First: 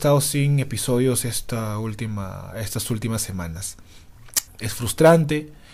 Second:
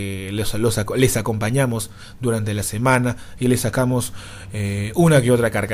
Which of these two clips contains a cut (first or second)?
first